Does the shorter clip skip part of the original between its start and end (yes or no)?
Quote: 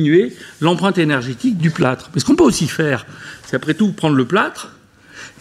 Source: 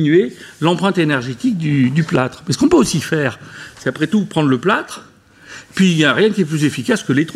yes